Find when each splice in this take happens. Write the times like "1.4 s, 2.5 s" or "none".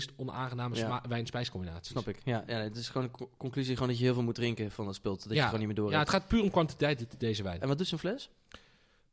none